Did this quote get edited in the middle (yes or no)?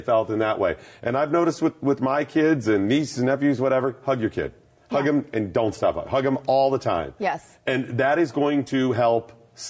no